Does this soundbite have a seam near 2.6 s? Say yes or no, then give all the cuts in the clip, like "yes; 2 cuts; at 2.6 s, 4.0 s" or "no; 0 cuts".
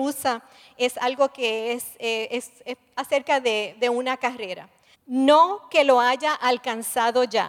no; 1 cut; at 4.9 s